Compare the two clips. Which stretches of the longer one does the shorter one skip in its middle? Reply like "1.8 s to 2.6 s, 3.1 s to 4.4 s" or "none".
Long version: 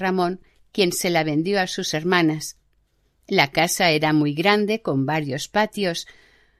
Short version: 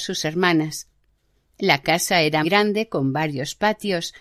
4.1 s to 4.4 s